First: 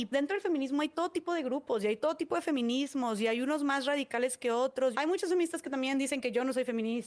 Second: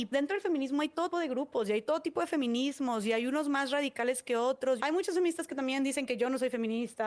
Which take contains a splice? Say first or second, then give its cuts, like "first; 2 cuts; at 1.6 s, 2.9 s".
second; 1 cut; at 1.1 s